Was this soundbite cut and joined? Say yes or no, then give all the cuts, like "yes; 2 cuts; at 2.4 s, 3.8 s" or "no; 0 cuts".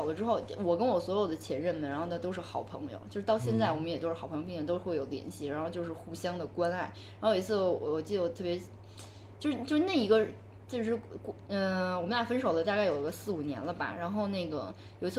no; 0 cuts